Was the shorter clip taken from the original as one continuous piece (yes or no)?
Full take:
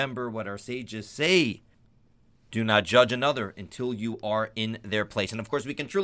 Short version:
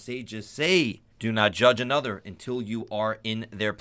no